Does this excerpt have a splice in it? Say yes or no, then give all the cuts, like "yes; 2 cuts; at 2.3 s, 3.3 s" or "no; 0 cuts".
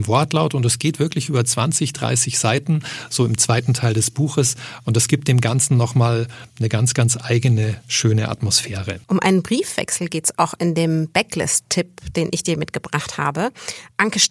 yes; 1 cut; at 9.0 s